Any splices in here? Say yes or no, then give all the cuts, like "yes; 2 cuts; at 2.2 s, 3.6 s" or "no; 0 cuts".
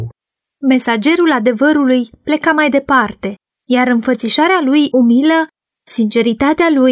no; 0 cuts